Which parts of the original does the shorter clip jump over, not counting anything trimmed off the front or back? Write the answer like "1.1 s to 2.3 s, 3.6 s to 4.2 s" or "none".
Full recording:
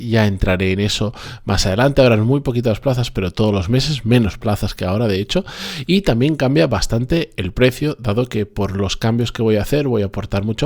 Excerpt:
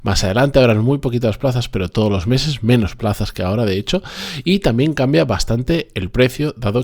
none